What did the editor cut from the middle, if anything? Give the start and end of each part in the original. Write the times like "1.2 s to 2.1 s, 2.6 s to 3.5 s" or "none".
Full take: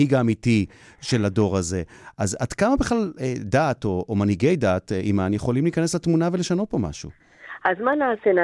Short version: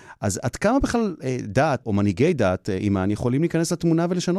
3.8 s to 4.1 s

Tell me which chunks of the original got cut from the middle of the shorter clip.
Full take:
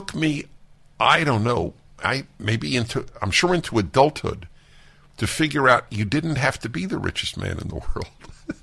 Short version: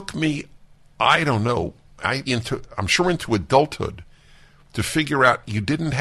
2.3 s to 2.7 s

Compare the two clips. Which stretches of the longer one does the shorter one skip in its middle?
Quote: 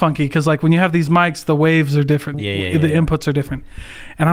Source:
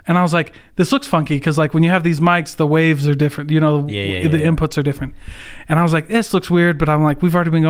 3.5 s to 3.8 s

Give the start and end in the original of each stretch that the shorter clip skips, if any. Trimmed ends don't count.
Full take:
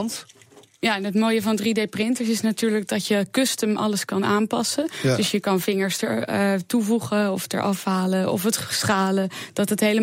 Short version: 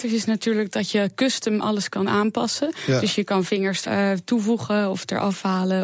6.0 s to 6.3 s

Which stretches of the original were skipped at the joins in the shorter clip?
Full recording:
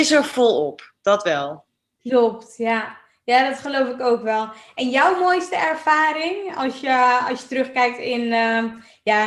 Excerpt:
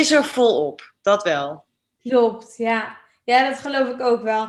none

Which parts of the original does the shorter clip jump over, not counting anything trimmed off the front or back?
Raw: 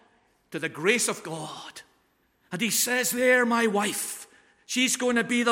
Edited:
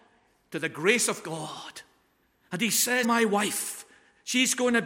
3.0 s to 3.5 s

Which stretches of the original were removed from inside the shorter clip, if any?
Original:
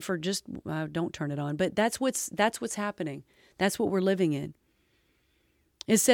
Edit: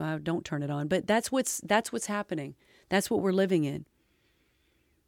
none

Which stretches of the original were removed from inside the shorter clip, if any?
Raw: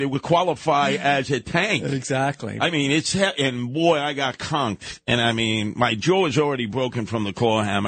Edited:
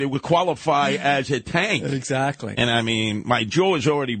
2.5 s to 5.0 s

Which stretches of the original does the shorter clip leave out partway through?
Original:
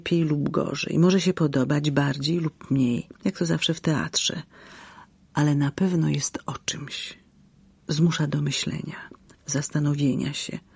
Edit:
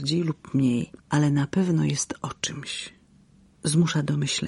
3.1 s to 5.2 s

